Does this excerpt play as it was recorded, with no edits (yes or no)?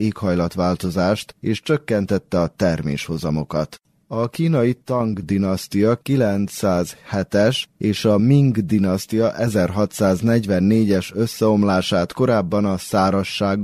no